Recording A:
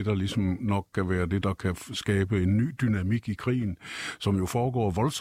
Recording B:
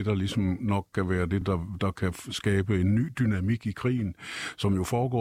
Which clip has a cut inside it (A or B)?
A